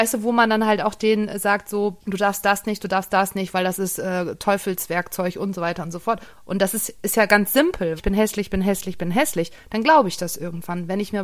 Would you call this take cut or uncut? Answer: cut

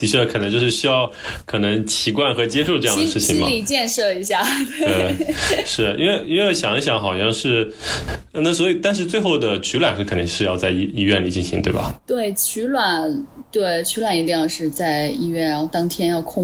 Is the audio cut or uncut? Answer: uncut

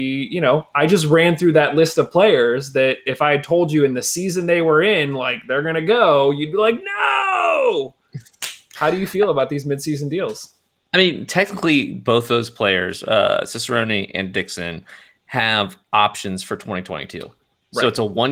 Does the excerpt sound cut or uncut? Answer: uncut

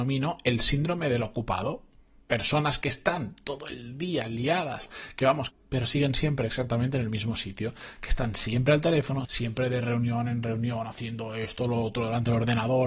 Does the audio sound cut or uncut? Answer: cut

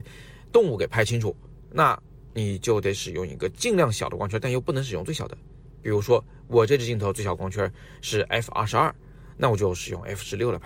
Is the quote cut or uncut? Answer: uncut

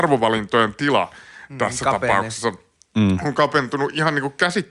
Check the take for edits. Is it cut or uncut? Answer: uncut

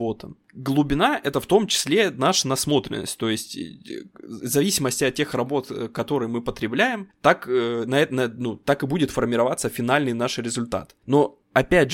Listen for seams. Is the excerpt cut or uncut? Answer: uncut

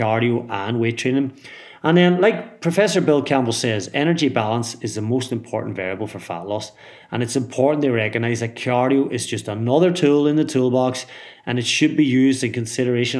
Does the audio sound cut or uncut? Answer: uncut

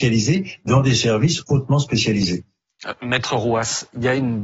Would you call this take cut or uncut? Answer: uncut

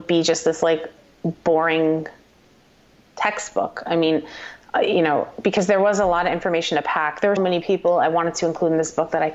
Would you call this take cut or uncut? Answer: cut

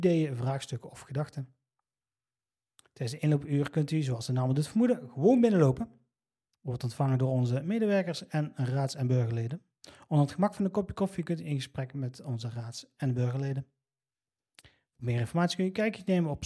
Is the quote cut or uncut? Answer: uncut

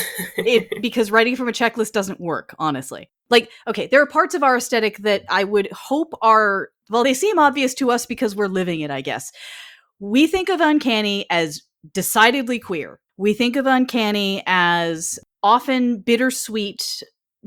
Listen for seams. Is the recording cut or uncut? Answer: uncut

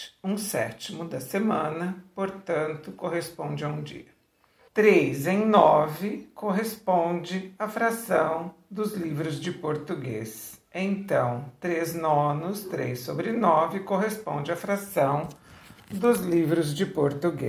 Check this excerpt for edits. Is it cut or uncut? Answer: cut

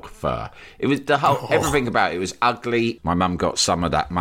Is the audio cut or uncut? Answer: cut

